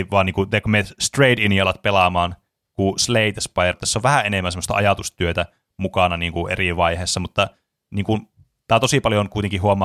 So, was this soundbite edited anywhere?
yes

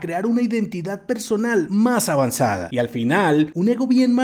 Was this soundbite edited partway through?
no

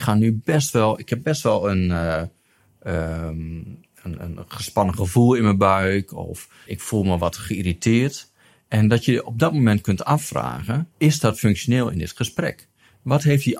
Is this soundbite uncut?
no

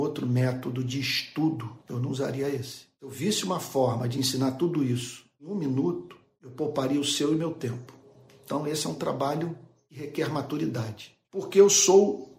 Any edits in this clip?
yes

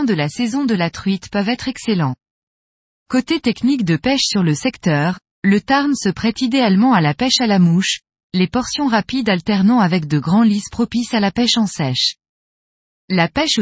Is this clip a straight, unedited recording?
yes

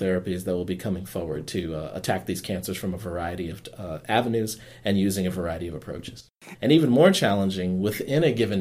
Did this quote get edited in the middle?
yes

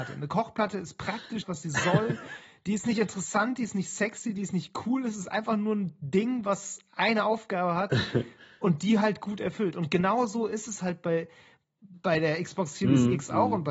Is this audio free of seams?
no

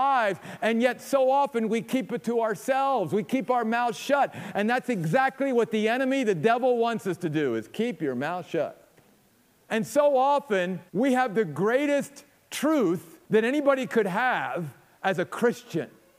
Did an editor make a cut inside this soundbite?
yes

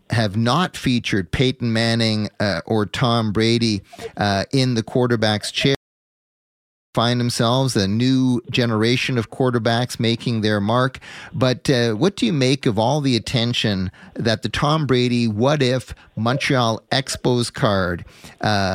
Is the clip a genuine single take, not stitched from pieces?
yes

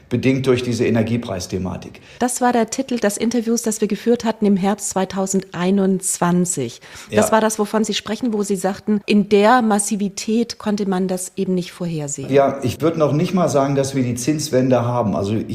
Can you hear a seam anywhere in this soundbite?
yes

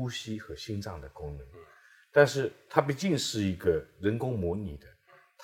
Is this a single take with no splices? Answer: yes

